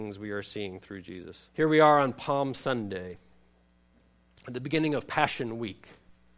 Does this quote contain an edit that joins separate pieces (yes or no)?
yes